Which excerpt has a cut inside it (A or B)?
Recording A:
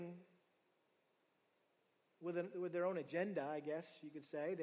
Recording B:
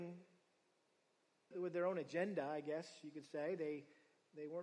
B